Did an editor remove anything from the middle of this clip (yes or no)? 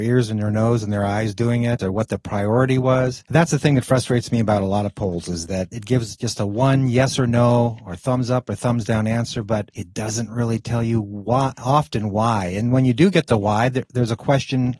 yes